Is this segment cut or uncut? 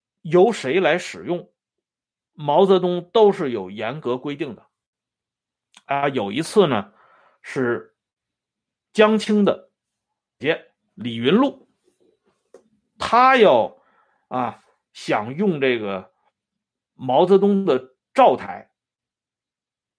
cut